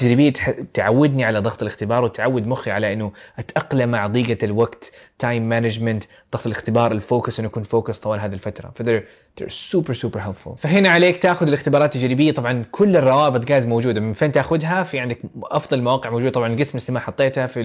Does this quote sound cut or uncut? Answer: uncut